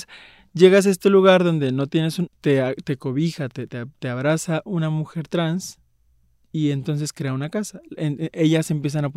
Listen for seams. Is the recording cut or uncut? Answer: cut